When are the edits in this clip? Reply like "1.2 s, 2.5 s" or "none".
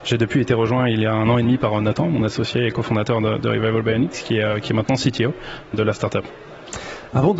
5.7 s

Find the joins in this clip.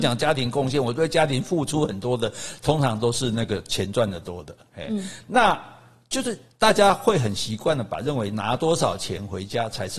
none

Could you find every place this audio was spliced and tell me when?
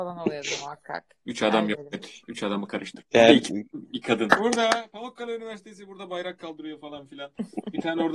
3.0 s, 4.3 s

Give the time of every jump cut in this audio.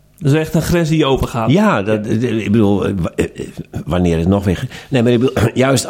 none

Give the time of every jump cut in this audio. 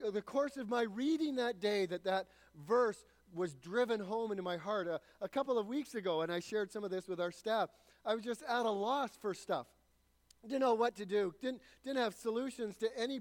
none

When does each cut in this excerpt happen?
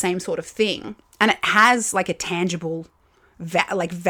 none

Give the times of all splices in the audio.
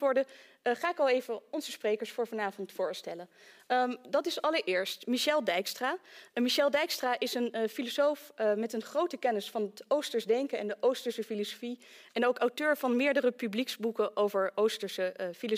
none

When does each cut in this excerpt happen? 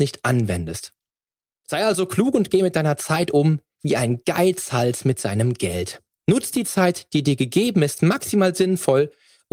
none

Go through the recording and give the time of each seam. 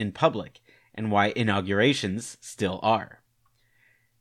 none

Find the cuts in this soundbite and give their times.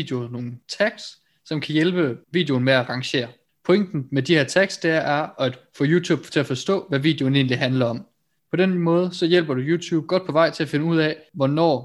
8.4 s

